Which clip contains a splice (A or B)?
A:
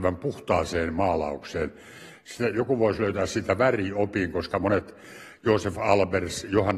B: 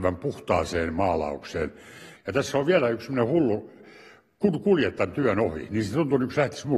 B